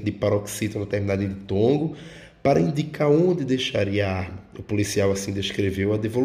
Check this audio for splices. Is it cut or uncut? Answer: uncut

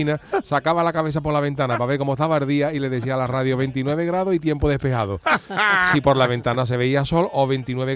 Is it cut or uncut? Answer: uncut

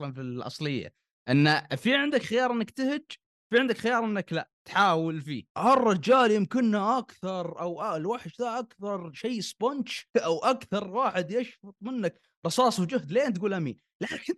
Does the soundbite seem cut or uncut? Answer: cut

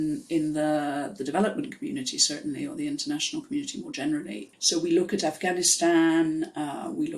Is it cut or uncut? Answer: cut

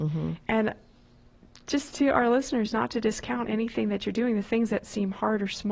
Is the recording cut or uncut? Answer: uncut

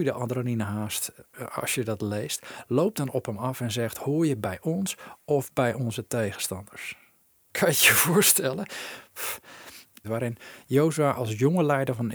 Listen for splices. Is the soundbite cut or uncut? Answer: cut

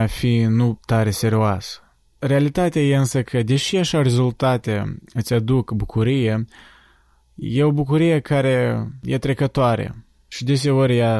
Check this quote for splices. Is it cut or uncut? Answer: cut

